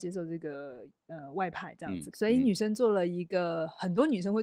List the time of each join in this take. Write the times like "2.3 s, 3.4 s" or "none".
2.1 s